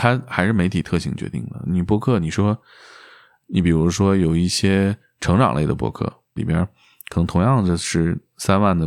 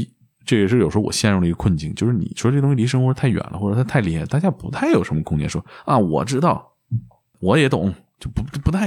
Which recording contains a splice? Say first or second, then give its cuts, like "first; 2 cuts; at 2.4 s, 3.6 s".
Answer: first; 1 cut; at 6.4 s